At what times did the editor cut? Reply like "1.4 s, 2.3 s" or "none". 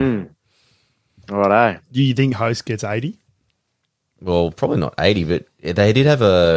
none